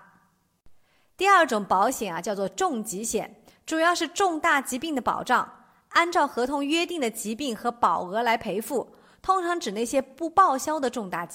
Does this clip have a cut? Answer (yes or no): no